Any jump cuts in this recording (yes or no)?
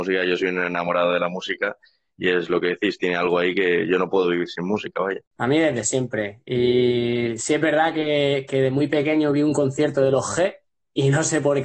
no